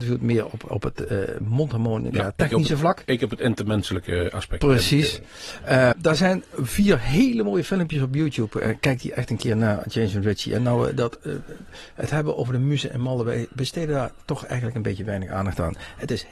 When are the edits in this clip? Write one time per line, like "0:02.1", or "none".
0:05.9